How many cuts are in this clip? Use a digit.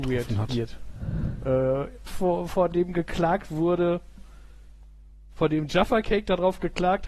1